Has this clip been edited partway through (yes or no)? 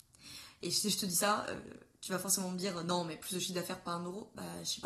no